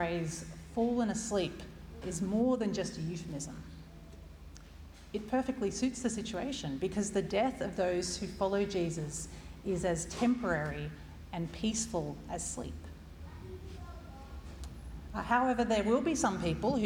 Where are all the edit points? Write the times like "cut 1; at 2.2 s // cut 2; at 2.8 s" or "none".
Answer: cut 1; at 2.0 s